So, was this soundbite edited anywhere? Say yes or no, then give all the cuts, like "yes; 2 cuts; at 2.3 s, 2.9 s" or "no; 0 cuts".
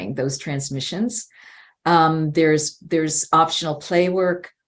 no; 0 cuts